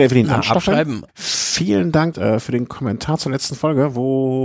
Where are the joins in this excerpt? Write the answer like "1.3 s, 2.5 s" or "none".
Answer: 1.1 s, 2.1 s